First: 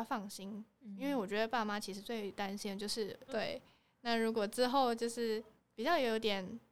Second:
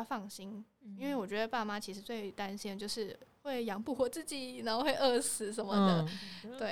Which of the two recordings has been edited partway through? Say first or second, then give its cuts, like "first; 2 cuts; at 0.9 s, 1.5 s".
first; 1 cut; at 3.3 s